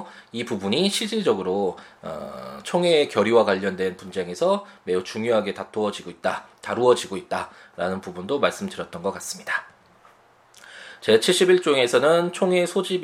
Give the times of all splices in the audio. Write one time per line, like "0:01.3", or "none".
0:11.0